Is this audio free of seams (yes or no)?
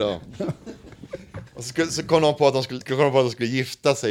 no